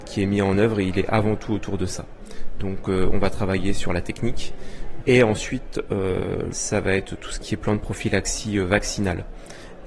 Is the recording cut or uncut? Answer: cut